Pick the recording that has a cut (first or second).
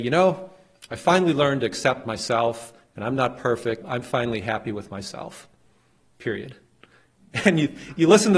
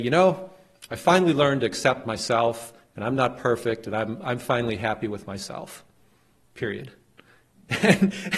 first